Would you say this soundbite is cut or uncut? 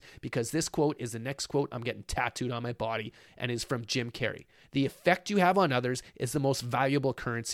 uncut